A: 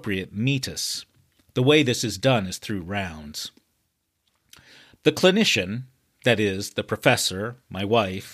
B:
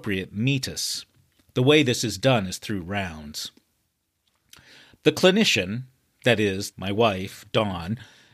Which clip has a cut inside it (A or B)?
B